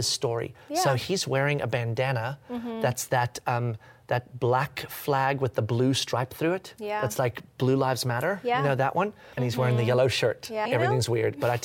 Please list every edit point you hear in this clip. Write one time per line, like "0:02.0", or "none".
0:09.4
0:10.7